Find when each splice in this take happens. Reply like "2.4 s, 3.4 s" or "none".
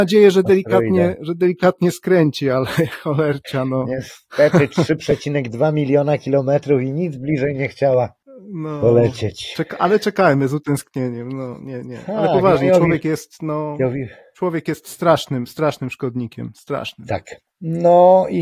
none